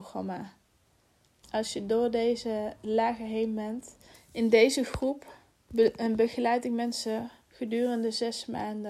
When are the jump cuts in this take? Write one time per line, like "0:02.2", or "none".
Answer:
0:01.4
0:04.1